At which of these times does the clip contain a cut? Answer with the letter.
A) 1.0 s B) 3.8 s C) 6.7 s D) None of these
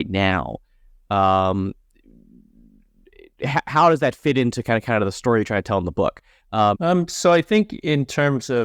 C